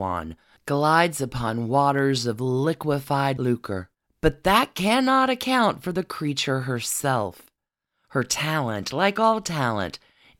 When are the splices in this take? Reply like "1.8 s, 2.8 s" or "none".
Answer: none